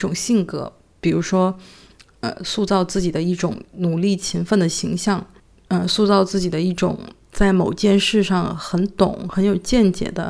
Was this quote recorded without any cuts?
yes; 0 cuts

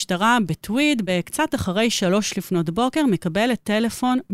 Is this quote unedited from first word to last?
yes; 0 cuts

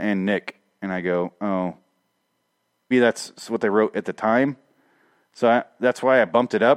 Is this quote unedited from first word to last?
no; 1 cut; at 2.9 s

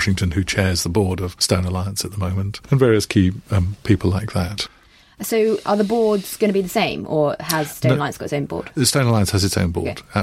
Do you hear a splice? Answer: no; 0 cuts

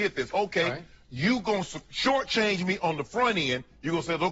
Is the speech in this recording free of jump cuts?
yes; 0 cuts

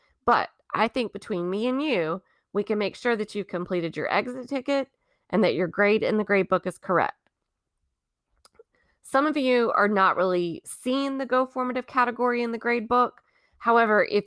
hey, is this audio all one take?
yes; 0 cuts

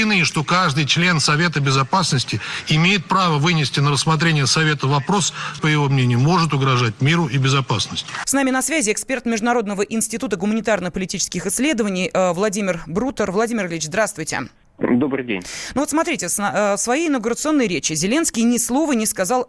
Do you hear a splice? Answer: yes; 2 cuts; at 5.6 s, 8.2 s

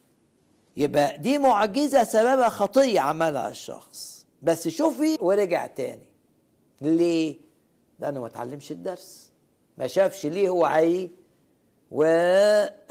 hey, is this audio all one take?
no; 1 cut; at 5.2 s

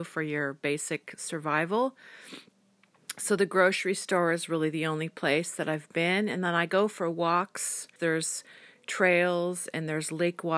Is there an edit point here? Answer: yes; 1 cut; at 8.0 s

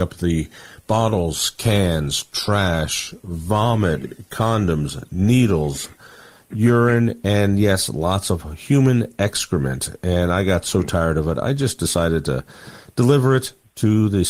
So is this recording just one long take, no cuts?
yes; 0 cuts

